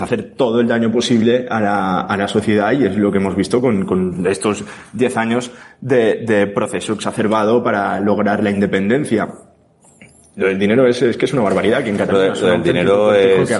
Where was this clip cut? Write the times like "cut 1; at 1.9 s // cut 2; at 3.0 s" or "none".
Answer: none